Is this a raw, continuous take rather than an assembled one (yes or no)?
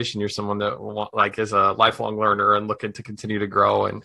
yes